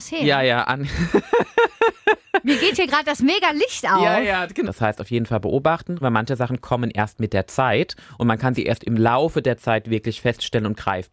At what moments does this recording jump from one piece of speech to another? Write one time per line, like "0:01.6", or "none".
0:04.6
0:06.0